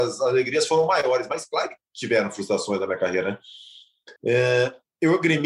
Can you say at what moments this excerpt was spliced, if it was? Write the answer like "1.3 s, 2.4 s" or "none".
4.2 s